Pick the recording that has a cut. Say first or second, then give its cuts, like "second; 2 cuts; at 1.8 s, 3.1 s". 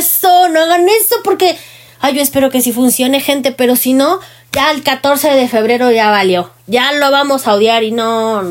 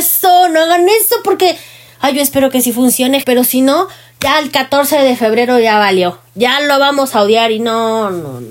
second; 1 cut; at 3.2 s